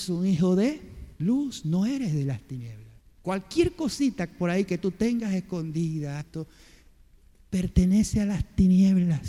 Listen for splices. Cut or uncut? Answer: cut